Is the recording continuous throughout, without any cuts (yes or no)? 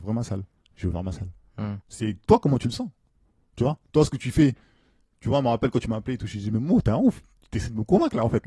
no